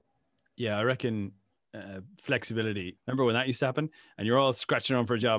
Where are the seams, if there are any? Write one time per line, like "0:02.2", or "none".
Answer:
0:03.0